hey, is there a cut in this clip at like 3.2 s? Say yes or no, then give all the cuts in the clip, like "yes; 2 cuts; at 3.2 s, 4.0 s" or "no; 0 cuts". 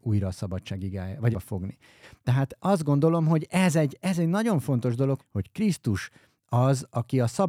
no; 2 cuts; at 1.3 s, 5.2 s